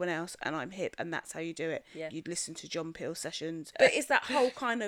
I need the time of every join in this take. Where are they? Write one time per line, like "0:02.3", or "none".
0:02.1
0:03.7

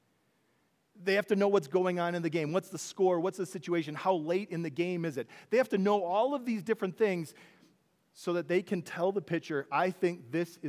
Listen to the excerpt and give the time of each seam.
none

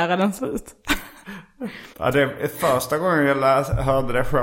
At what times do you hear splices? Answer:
0:01.9

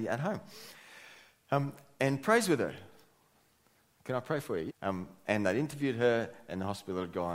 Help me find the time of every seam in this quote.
0:04.7

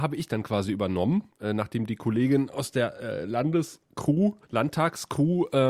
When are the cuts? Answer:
0:01.3
0:04.4

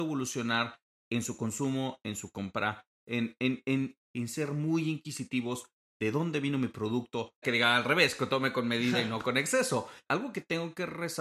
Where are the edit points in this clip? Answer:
0:04.0
0:07.4
0:10.1

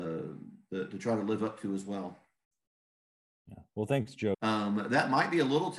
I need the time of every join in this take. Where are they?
0:04.3

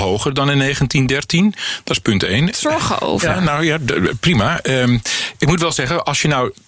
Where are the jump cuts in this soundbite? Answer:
0:02.5

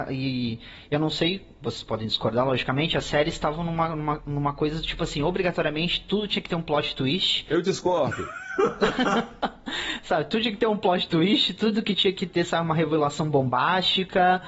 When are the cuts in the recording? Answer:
none

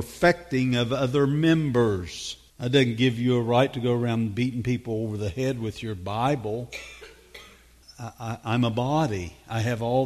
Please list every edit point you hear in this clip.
0:02.5
0:07.8

